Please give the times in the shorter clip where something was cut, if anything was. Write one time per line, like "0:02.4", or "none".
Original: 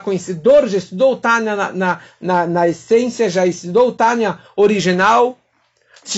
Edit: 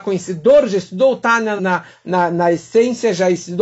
0:01.6